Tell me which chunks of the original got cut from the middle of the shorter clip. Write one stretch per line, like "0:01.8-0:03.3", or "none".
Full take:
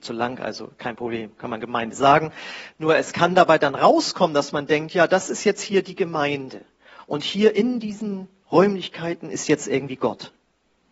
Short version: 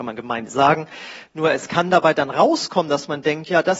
none